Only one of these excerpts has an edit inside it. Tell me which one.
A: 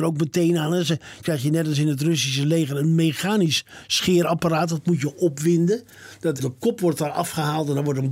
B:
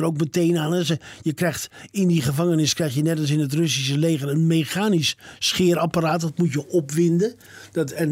A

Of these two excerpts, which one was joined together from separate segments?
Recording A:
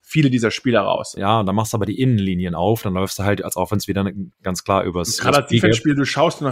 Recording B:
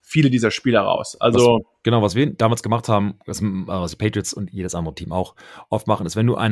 A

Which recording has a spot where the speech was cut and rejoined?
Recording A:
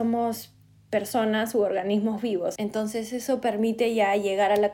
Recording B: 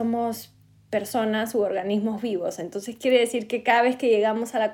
A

